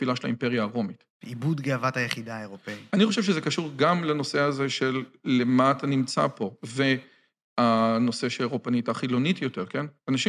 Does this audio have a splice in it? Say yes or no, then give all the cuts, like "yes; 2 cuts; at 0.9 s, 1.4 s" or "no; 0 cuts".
yes; 1 cut; at 1.2 s